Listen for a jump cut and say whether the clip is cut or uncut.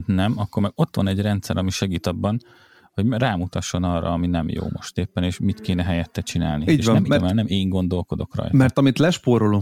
cut